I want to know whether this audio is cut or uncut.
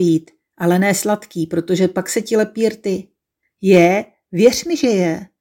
cut